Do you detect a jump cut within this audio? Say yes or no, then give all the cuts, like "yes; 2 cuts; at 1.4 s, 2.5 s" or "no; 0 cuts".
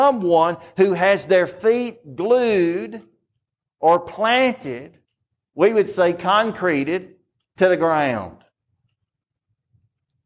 no; 0 cuts